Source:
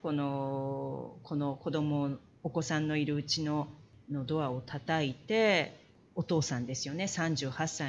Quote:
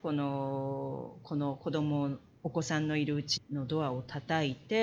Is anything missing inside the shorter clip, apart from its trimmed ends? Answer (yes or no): yes